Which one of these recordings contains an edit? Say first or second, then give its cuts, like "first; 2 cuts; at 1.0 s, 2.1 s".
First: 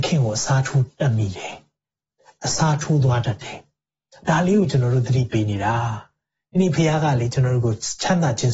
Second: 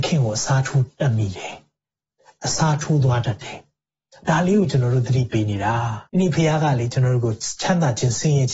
second; 1 cut; at 6.1 s